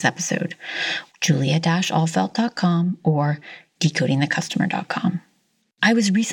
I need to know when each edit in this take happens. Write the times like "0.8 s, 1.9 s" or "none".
1.1 s

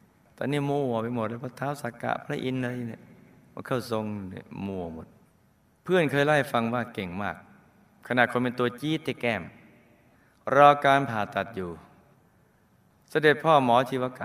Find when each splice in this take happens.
none

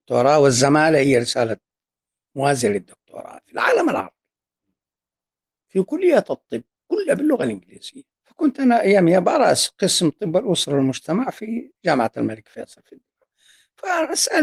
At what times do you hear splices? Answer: 8.1 s, 11.8 s

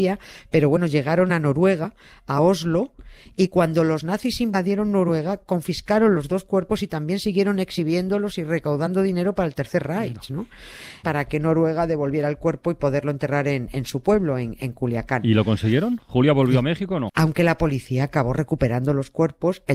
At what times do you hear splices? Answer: 11.0 s, 17.1 s

